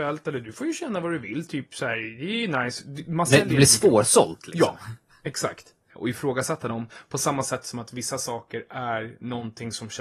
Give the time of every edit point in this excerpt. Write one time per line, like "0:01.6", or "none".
0:05.9